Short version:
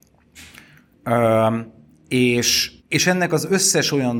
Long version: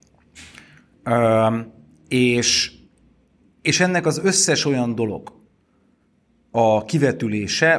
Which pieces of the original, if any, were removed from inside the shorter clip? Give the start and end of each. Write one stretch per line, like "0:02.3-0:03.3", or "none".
0:02.8-0:03.5